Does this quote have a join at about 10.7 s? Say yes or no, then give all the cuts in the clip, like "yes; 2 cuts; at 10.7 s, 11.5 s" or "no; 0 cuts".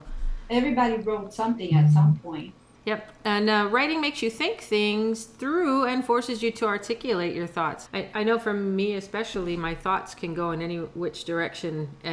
no; 2 cuts; at 2.7 s, 7.9 s